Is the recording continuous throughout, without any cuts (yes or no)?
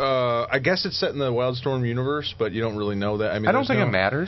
yes